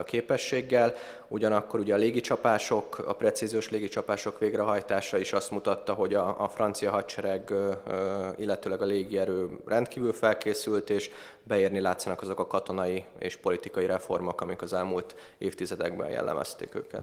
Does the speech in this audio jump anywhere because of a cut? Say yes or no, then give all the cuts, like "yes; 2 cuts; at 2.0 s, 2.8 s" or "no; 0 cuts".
no; 0 cuts